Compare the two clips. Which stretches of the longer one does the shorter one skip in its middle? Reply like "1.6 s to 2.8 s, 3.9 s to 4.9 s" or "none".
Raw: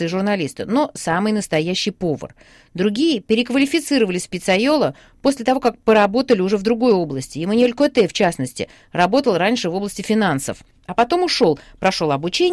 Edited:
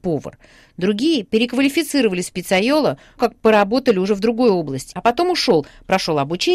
5.1 s to 5.6 s, 7.3 s to 10.8 s